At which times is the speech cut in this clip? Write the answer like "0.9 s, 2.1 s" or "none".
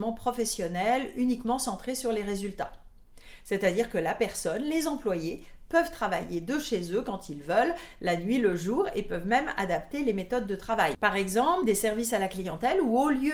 none